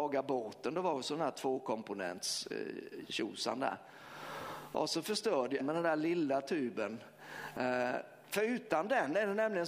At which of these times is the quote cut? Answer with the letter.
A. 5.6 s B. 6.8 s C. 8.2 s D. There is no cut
A